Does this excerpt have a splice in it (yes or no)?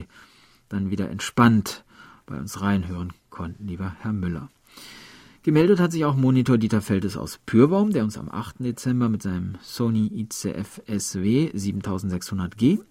no